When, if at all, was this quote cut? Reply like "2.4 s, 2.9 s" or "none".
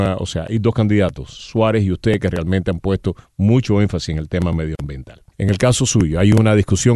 5.3 s